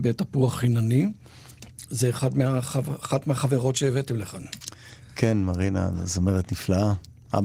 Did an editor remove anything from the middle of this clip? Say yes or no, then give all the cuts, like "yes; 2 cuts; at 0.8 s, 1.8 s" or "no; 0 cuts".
no; 0 cuts